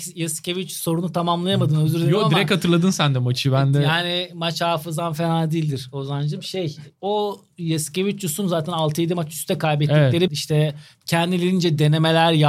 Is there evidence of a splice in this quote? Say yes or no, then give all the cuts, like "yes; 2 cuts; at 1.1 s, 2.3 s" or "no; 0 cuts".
yes; 1 cut; at 10.3 s